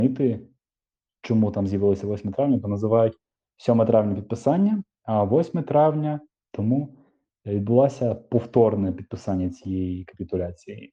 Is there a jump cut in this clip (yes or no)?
yes